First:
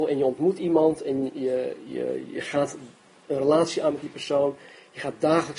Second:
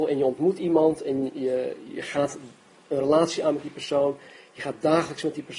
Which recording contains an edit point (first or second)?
second